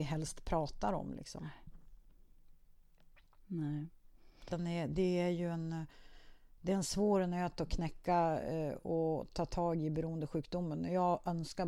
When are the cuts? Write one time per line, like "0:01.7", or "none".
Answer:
none

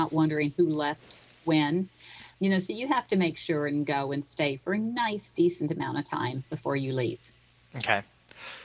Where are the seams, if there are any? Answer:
0:02.3

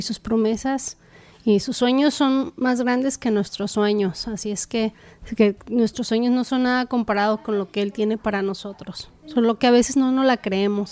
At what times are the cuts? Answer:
none

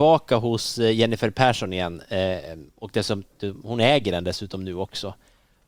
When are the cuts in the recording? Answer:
none

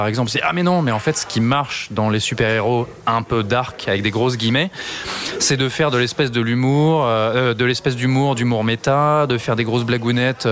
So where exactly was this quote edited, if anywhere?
none

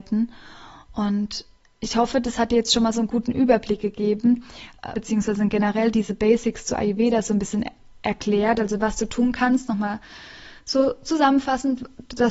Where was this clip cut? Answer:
0:04.9

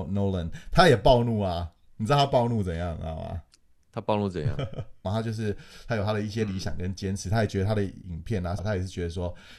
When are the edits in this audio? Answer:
0:05.0
0:08.6

